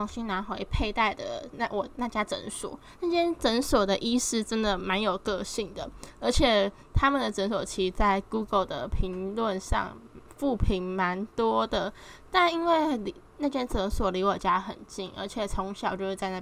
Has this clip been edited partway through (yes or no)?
no